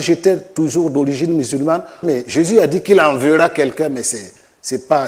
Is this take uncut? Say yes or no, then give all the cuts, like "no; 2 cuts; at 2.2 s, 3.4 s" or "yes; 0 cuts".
no; 1 cut; at 2.0 s